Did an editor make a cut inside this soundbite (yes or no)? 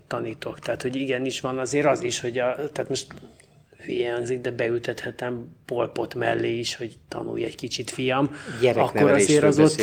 no